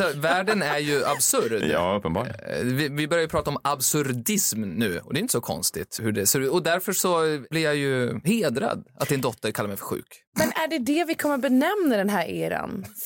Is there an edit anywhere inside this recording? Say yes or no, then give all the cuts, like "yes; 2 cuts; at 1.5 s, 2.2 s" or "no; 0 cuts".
yes; 1 cut; at 6.0 s